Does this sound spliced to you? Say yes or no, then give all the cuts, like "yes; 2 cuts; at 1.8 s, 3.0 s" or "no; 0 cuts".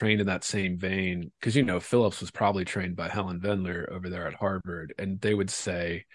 no; 0 cuts